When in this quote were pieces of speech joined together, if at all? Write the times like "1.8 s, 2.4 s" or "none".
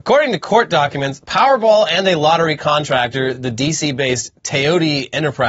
none